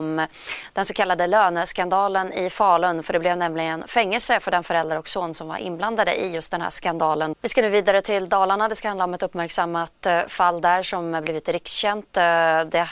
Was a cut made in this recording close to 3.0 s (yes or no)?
no